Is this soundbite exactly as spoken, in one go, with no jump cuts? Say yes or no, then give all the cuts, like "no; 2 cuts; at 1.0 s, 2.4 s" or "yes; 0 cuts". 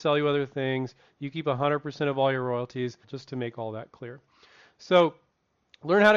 no; 1 cut; at 3.0 s